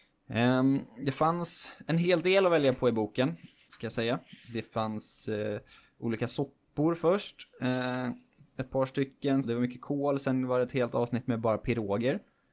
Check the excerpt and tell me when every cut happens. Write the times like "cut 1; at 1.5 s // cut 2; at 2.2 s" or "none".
cut 1; at 3.6 s // cut 2; at 9.4 s